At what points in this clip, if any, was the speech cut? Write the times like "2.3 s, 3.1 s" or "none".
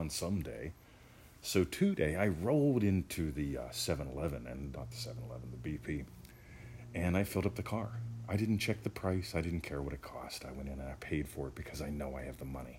4.7 s